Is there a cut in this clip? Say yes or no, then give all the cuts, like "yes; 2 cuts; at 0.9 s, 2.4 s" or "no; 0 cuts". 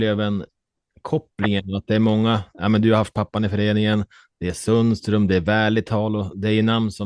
no; 0 cuts